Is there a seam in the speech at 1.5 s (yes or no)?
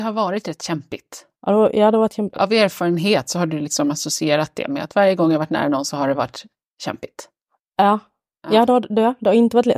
no